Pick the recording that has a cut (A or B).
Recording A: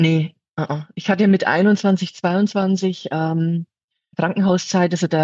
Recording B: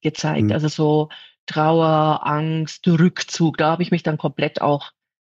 A